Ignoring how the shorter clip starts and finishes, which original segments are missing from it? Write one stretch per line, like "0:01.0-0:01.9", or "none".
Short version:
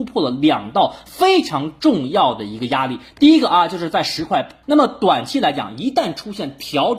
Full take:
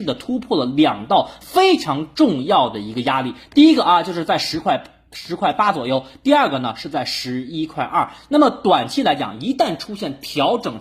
0:05.0-0:08.3

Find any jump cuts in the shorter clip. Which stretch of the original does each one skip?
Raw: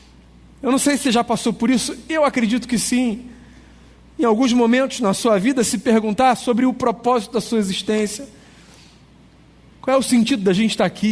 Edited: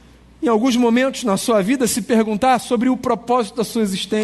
none

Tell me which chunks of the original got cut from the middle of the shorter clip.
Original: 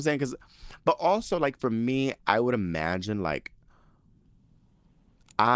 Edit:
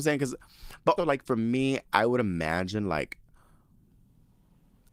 0:01.0-0:01.3

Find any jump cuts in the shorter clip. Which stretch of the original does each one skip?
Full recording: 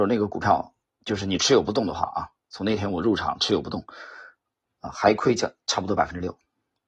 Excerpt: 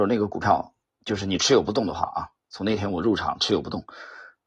none

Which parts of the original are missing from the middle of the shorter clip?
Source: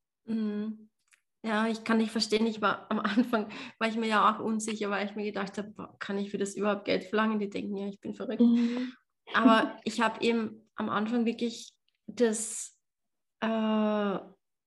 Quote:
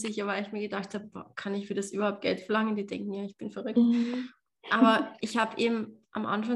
none

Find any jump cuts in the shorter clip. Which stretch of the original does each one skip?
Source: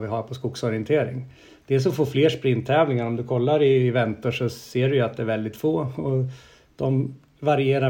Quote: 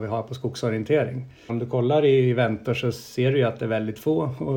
0:01.5-0:03.1

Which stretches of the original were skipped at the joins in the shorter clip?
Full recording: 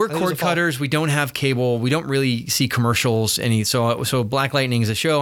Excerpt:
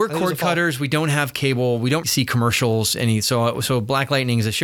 0:02.0-0:02.5

